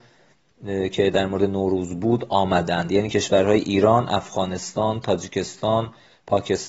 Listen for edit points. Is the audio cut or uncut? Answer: uncut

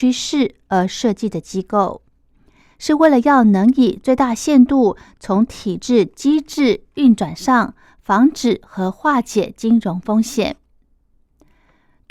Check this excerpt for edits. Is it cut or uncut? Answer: cut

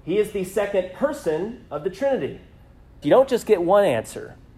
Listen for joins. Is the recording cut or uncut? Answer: cut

